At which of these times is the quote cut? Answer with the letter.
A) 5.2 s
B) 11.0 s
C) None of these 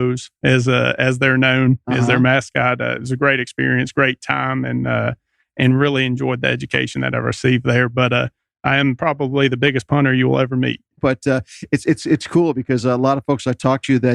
B